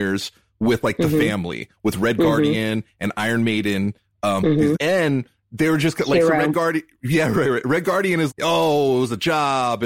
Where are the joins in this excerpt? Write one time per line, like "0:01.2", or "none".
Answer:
0:04.7
0:08.3